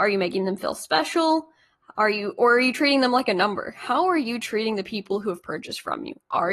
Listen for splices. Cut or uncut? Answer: uncut